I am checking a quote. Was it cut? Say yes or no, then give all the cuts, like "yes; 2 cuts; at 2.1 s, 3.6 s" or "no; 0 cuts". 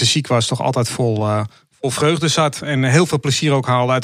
no; 0 cuts